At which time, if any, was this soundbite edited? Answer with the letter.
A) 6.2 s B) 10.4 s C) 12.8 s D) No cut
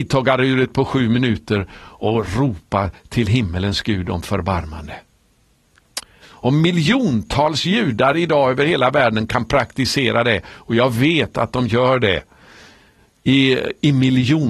A